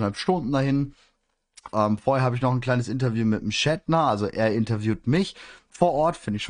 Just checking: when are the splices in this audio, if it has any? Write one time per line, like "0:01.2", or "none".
0:01.7